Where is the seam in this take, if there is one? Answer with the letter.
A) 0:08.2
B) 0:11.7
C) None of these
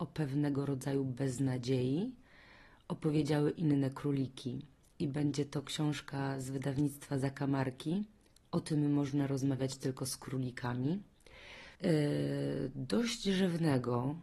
B